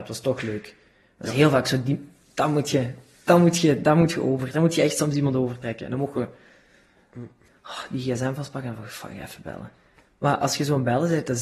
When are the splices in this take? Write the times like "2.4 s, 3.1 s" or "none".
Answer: 7.5 s